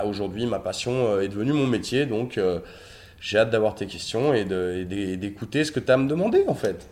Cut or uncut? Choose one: uncut